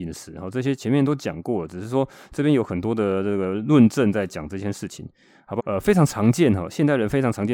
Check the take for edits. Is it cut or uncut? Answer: cut